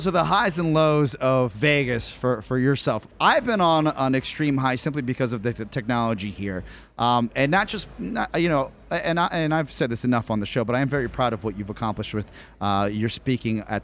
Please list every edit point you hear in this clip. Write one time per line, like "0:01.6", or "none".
none